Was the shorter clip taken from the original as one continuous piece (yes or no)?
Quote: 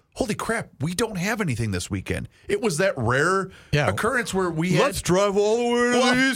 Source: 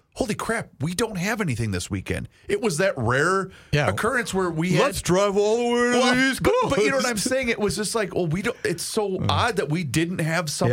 yes